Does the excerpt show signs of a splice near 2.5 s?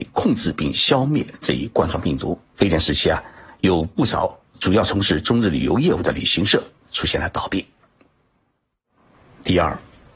yes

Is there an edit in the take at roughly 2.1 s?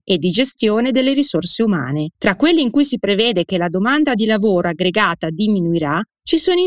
yes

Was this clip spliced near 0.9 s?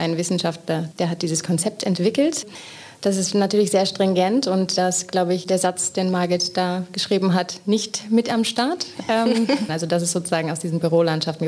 yes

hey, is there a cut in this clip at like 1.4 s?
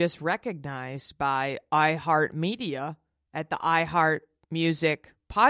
no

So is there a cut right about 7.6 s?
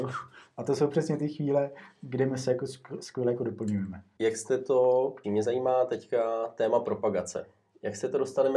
no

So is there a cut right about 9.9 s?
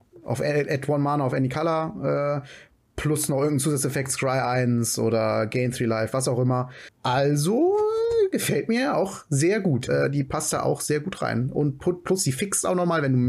yes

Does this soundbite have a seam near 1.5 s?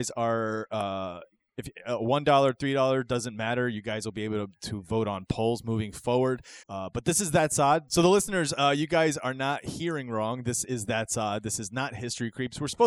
no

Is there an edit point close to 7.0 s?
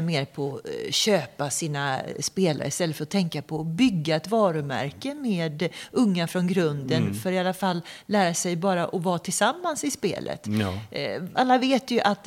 no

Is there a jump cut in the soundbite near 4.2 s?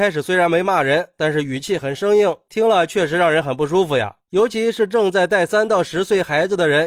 yes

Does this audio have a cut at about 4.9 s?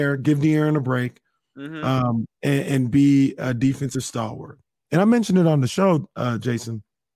yes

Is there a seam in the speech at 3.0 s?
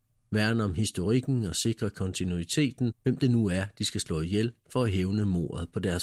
yes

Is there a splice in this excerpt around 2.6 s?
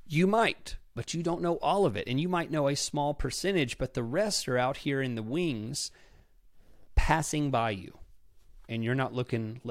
no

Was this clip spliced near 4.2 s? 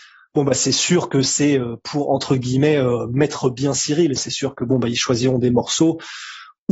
yes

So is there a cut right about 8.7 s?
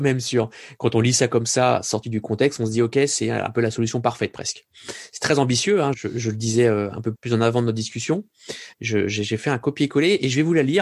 yes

